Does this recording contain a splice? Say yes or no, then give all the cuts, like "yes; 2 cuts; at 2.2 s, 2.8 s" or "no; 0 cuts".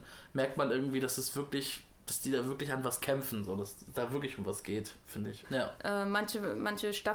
yes; 1 cut; at 5.4 s